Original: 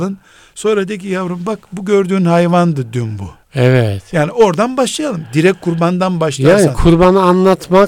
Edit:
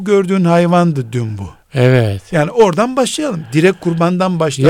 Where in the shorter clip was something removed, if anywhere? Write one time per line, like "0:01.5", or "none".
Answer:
none